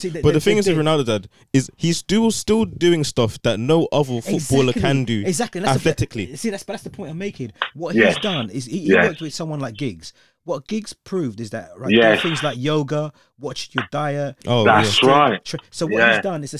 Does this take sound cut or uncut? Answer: uncut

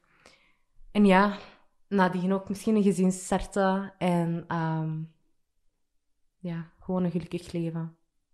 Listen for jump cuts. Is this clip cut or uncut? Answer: uncut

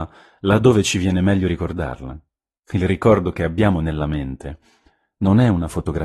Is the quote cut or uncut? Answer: uncut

